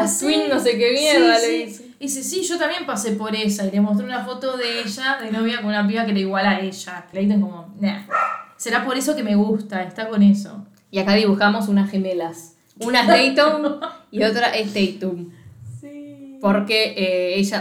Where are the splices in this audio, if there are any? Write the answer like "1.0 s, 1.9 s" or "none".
7.1 s